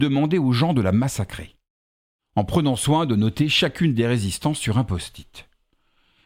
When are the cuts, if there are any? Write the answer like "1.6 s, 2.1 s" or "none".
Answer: none